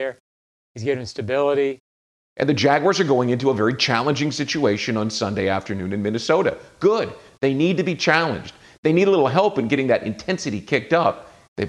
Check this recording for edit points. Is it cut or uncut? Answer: cut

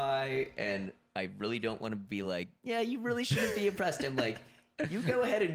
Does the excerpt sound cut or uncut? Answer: uncut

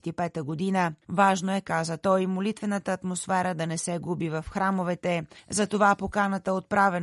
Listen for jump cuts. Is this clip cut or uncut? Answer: cut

